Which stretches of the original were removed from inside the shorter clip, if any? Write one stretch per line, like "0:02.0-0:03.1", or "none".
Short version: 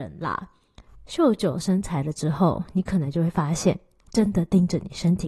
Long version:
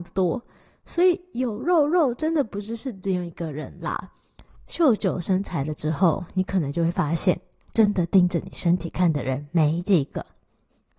none